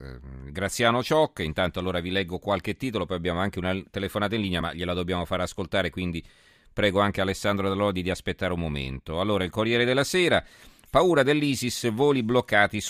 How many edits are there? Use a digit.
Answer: 0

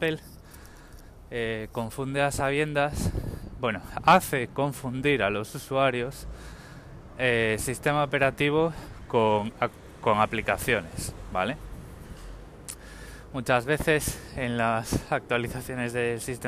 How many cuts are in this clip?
0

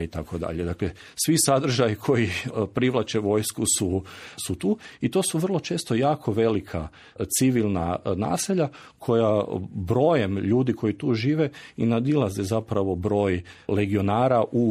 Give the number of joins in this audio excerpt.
0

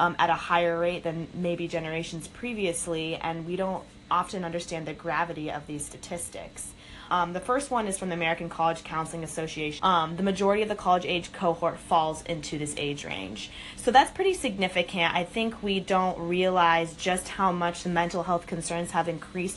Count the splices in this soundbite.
2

